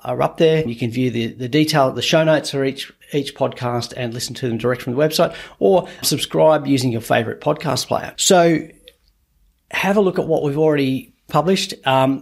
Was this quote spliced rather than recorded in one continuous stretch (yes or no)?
yes